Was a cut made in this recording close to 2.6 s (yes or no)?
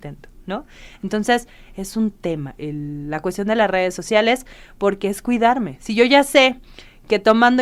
yes